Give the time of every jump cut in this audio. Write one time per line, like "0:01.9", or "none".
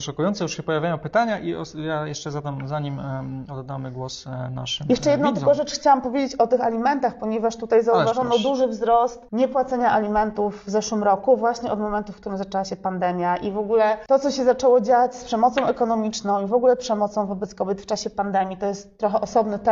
none